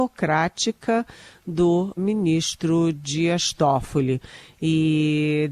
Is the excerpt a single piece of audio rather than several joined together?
no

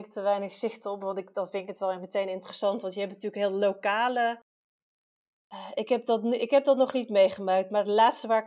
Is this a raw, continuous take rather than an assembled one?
yes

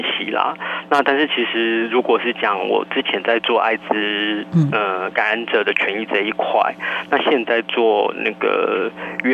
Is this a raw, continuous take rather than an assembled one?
no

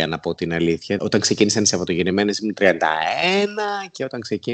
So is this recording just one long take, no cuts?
no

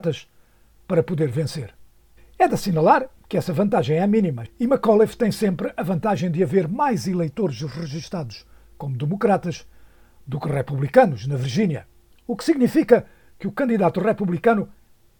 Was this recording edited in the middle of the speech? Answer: yes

